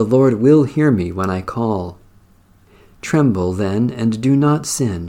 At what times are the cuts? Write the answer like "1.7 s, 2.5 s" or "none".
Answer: none